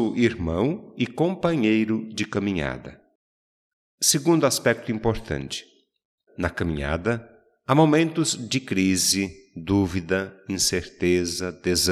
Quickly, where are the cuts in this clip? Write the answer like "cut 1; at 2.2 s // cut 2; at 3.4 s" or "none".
cut 1; at 6.3 s